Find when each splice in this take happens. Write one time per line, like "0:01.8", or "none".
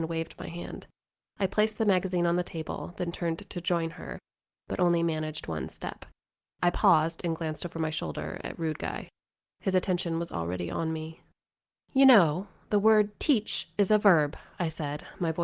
none